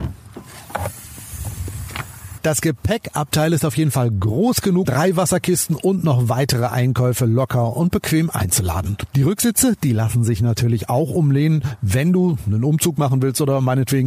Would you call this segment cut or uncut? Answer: cut